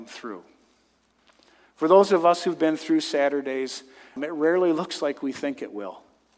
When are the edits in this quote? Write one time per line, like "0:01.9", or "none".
0:04.2

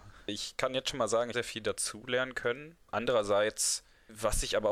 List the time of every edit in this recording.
0:01.3
0:02.8

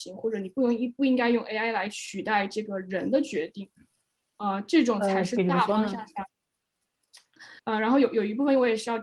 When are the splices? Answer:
0:07.6

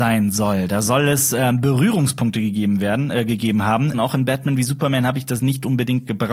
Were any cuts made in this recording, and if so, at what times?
0:03.9

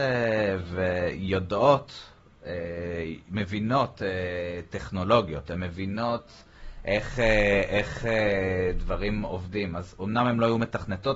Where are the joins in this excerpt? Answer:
none

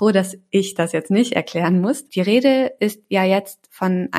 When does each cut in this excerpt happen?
0:02.1

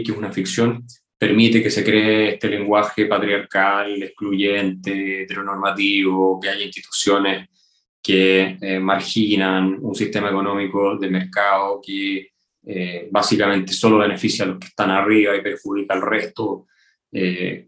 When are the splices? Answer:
none

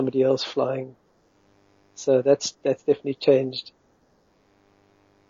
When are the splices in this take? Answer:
none

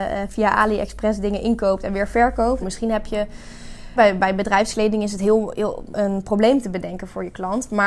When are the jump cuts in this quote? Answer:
0:02.6
0:04.0
0:05.9

